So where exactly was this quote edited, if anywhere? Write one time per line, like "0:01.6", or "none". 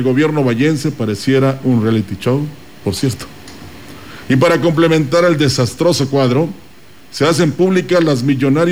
0:02.8